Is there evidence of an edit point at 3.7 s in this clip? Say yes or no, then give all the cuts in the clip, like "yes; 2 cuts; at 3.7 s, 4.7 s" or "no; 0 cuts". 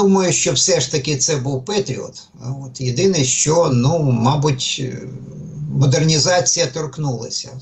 no; 0 cuts